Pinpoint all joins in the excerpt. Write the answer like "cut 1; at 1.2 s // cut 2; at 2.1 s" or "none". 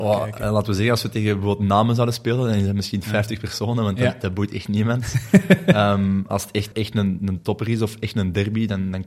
cut 1; at 6.7 s